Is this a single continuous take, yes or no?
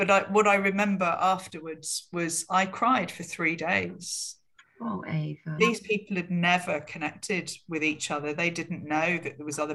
no